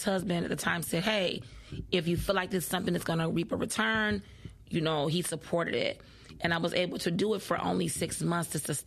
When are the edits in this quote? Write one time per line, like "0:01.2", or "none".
none